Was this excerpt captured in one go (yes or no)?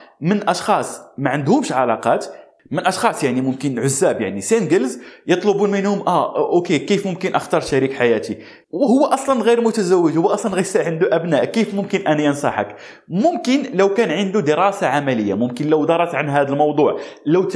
no